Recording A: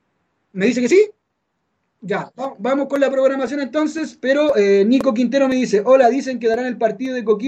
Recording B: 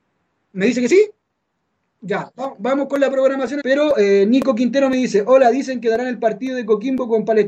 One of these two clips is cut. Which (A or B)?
B